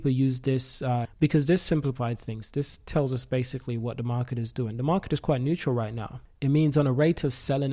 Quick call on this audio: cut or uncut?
cut